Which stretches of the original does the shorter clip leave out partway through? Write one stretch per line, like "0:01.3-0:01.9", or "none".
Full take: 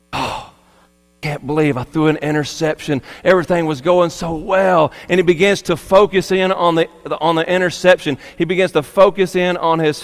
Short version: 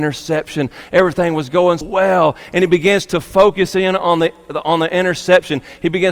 0:04.1-0:04.4